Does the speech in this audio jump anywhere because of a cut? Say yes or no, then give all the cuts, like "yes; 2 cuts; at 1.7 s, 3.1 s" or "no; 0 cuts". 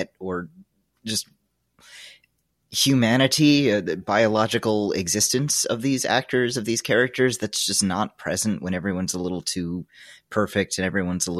no; 0 cuts